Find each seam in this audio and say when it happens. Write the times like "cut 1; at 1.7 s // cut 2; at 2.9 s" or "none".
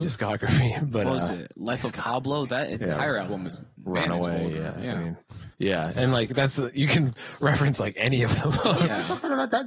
cut 1; at 5.5 s